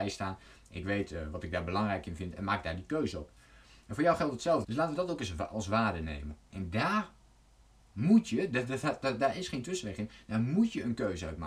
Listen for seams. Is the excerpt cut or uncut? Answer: cut